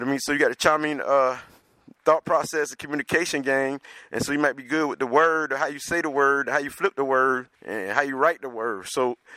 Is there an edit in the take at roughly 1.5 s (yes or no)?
no